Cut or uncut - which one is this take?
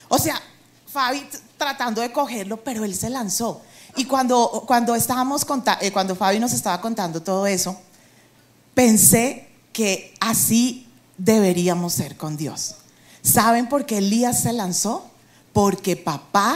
uncut